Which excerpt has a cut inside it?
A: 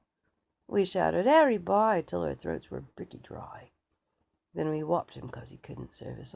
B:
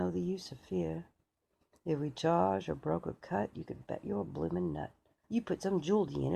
B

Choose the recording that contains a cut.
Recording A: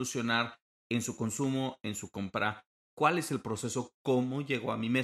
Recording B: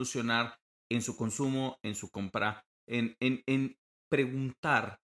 A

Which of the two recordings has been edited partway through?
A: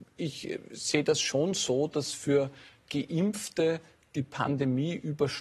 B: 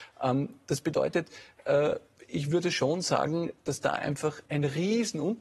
B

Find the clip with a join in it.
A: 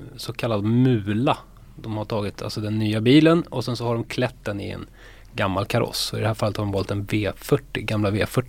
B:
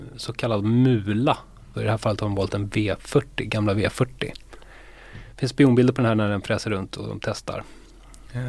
B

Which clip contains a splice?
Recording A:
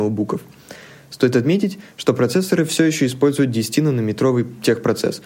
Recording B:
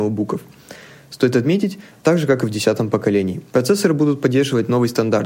B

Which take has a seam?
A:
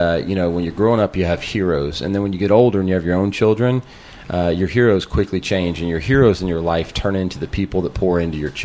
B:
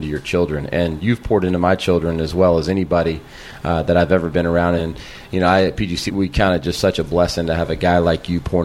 B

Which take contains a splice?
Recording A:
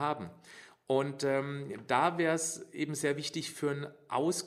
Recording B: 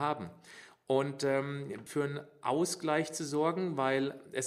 B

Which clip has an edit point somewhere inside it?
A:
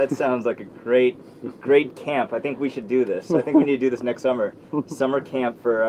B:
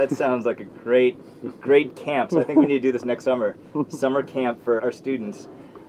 B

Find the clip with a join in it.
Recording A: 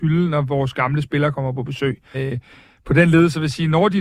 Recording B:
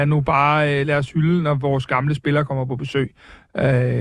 A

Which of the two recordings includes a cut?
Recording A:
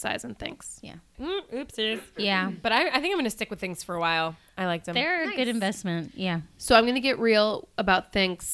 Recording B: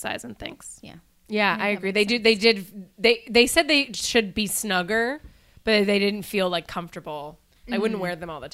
A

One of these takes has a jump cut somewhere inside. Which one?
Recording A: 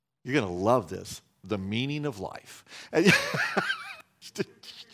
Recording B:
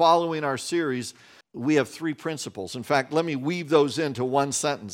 B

